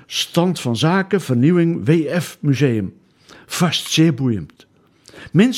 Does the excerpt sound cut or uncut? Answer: uncut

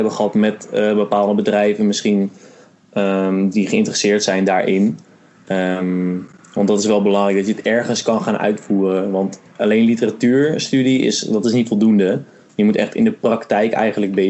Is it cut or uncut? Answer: uncut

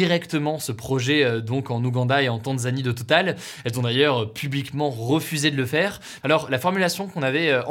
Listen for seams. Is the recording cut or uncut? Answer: cut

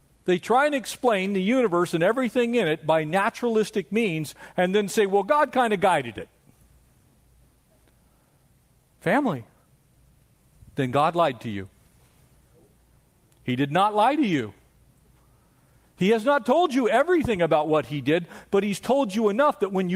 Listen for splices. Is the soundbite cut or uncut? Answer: uncut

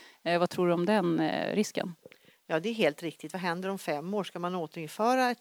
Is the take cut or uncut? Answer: uncut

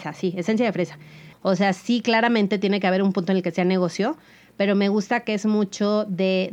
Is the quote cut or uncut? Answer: cut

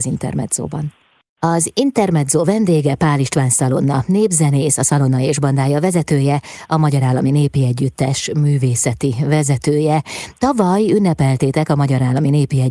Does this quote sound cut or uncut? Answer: uncut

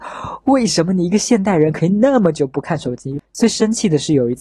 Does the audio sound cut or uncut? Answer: cut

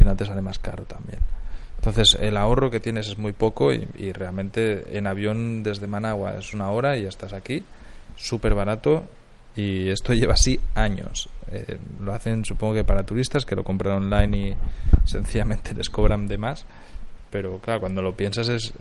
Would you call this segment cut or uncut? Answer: cut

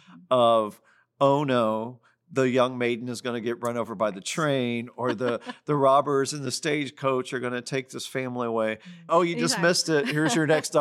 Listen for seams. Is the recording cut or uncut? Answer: cut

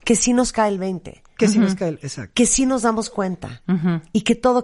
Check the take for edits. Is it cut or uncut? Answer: uncut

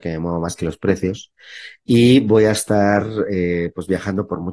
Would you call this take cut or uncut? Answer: uncut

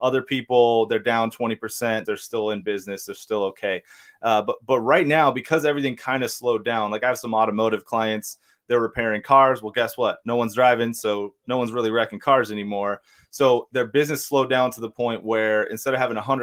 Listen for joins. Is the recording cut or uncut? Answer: cut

